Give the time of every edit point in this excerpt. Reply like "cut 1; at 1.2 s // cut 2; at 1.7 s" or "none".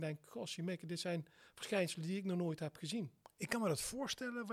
none